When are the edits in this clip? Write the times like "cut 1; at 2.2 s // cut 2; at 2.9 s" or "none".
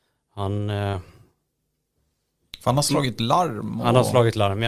none